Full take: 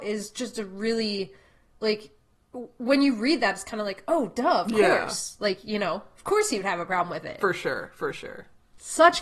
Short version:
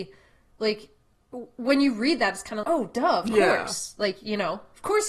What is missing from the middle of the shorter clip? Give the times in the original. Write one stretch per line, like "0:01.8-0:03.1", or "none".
0:03.8-0:04.1